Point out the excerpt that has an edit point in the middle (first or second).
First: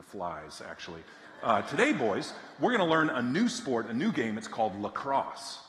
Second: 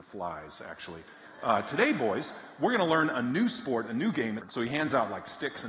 second